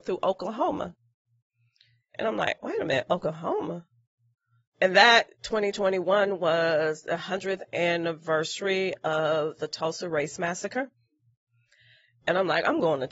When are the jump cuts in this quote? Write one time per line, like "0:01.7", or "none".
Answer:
none